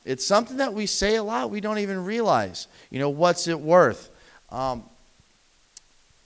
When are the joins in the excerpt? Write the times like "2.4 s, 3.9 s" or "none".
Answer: none